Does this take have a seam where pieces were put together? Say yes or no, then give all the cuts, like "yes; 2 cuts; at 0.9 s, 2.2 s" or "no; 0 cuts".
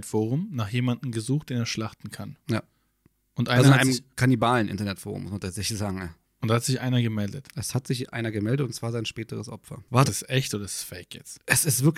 yes; 1 cut; at 10.1 s